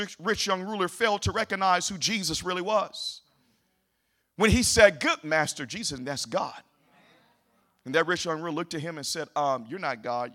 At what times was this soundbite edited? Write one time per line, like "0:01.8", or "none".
0:06.0

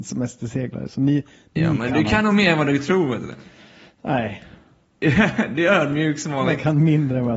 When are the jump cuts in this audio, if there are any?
none

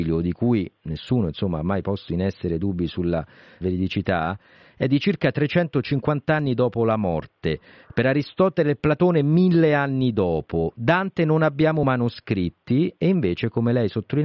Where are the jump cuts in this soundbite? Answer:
0:03.6

